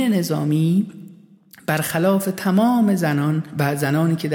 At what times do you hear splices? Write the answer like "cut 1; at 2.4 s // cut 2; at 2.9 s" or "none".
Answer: none